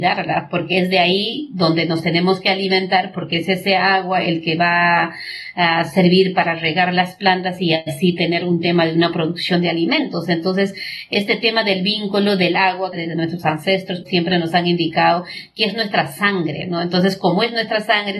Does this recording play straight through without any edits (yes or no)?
no